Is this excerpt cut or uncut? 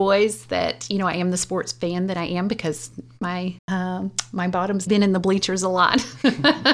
cut